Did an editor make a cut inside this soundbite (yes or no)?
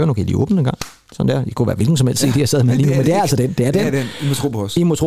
no